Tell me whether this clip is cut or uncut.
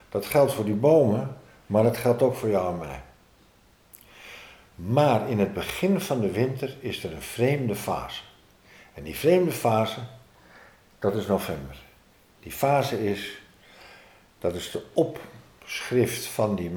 uncut